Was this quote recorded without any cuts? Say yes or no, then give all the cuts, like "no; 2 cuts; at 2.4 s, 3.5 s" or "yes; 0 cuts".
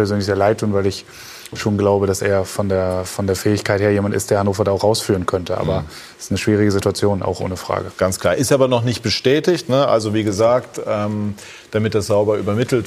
yes; 0 cuts